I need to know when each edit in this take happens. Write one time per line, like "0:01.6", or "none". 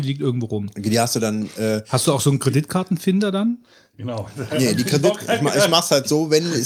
none